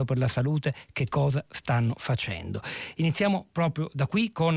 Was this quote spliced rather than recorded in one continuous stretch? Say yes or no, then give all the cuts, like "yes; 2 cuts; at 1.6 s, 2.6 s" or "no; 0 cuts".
no; 0 cuts